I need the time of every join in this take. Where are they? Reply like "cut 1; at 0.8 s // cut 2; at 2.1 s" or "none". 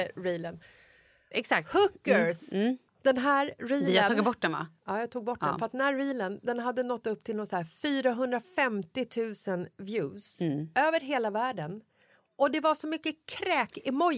cut 1; at 1.3 s // cut 2; at 2.9 s